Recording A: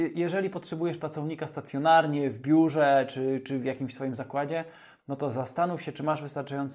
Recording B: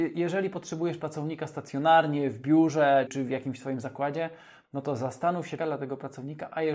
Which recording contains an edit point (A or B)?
B